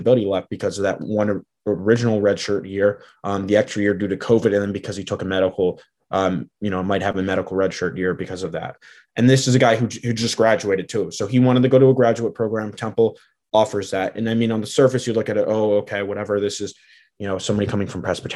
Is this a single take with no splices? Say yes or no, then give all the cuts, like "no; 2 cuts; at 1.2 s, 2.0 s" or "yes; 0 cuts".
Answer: yes; 0 cuts